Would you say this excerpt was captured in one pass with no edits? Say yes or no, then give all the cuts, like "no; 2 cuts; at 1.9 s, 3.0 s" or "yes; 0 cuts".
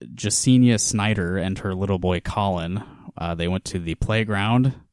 yes; 0 cuts